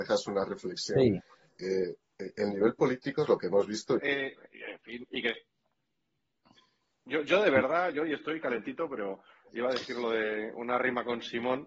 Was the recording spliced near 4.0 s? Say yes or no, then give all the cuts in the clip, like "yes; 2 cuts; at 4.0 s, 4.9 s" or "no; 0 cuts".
yes; 1 cut; at 4.0 s